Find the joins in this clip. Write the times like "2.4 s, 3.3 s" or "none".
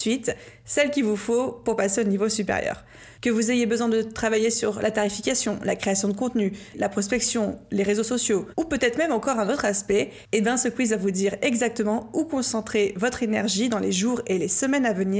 6.7 s